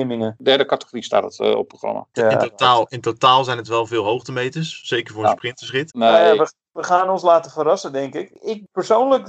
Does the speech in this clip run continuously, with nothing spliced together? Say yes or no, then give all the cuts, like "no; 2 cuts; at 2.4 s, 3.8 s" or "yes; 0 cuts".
no; 2 cuts; at 2.1 s, 5.9 s